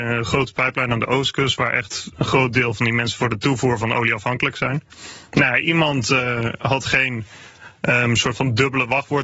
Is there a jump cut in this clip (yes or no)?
no